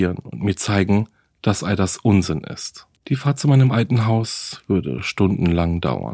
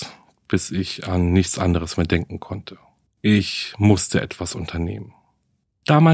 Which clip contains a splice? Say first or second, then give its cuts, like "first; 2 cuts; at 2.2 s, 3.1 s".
first; 1 cut; at 3.0 s